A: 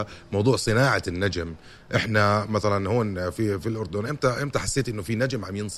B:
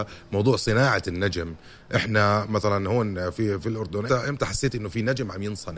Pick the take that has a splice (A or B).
B